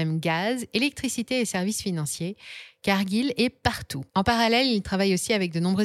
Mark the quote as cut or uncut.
cut